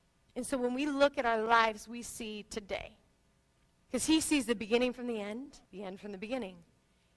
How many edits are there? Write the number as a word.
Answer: two